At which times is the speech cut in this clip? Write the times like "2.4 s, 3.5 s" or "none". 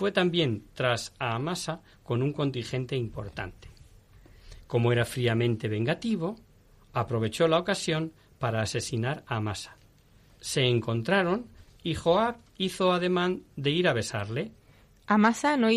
none